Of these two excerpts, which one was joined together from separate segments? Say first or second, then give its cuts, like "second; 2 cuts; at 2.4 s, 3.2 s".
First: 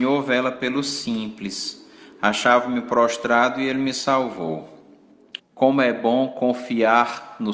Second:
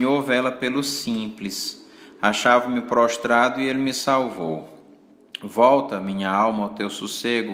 first; 1 cut; at 5.4 s